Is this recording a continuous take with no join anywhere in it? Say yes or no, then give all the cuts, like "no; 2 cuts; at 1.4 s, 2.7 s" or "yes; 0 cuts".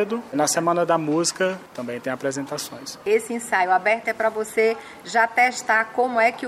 no; 2 cuts; at 1.7 s, 4.0 s